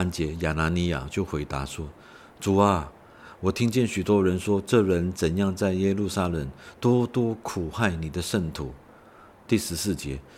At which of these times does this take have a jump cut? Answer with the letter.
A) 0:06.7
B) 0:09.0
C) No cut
C